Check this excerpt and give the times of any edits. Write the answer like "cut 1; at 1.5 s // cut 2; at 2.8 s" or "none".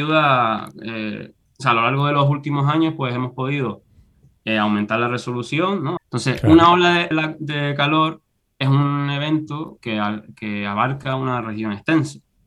cut 1; at 6.0 s // cut 2; at 7.1 s